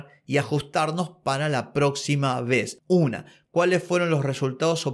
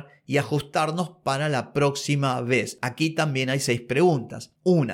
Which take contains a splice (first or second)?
first